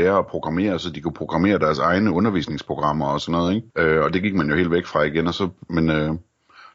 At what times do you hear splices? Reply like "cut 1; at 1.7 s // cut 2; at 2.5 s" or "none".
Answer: cut 1; at 3.7 s // cut 2; at 5.7 s